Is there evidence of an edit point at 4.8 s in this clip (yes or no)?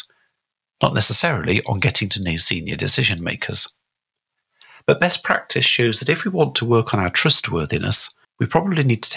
no